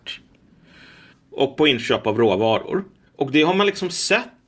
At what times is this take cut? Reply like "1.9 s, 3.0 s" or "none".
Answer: 1.1 s, 3.1 s